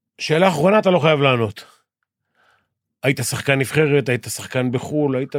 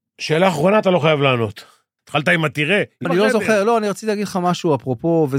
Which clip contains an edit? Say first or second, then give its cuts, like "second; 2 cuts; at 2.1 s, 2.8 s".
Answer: second; 2 cuts; at 2.0 s, 3.1 s